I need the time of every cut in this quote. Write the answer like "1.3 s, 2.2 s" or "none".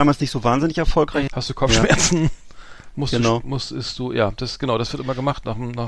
1.3 s